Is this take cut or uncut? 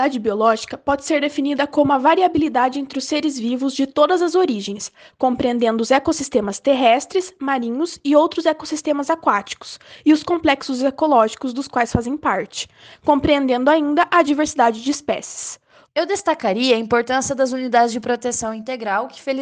cut